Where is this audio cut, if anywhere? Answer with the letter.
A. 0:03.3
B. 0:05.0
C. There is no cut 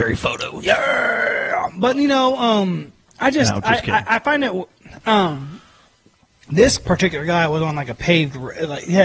B